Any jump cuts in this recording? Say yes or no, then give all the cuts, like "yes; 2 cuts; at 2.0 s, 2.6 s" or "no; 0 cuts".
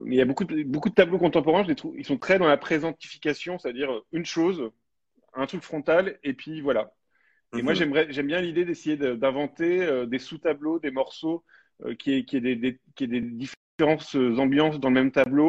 no; 0 cuts